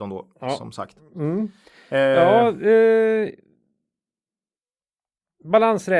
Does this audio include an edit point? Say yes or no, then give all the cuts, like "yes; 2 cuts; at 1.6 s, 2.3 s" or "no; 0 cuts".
no; 0 cuts